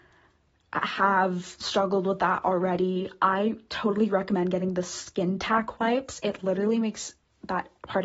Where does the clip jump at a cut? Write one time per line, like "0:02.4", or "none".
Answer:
none

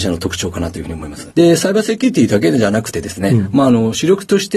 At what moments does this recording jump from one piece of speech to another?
0:01.3

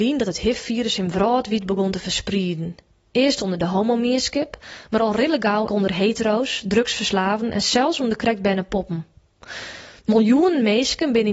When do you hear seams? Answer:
0:05.7

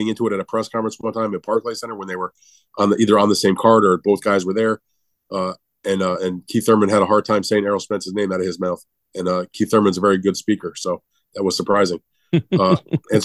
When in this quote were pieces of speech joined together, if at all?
none

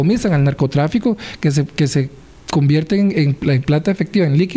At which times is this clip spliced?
none

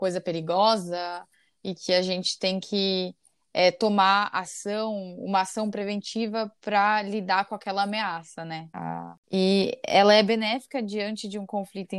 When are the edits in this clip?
0:08.7

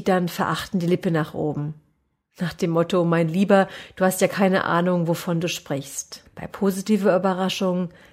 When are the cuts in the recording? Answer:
0:06.3

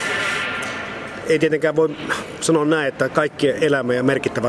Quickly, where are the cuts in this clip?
none

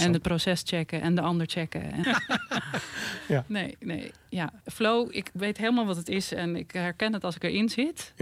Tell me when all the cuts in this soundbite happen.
0:02.0
0:04.6

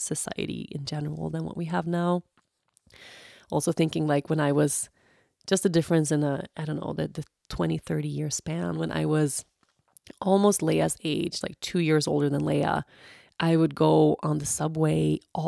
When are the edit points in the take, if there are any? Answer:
0:11.4

